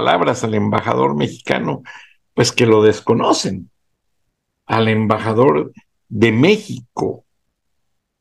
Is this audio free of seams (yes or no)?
yes